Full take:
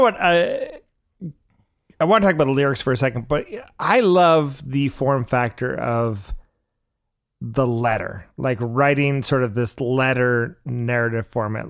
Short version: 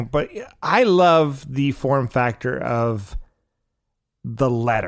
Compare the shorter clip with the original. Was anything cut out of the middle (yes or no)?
no